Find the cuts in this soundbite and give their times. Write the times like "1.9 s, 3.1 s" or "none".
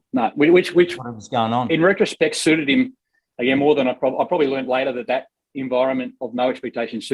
none

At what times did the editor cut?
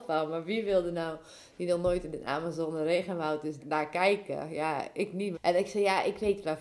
3.6 s, 5.3 s

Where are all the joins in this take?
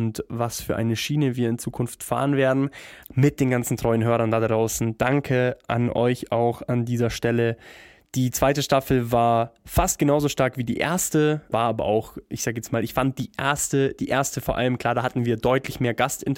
3.0 s, 11.5 s

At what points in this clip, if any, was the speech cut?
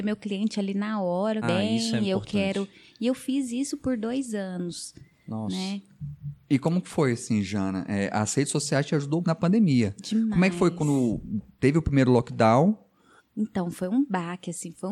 1.4 s, 9.2 s, 13.2 s

